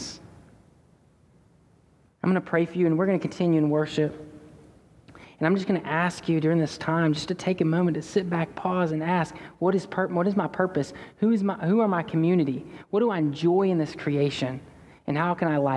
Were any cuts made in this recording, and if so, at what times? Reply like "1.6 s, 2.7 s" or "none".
none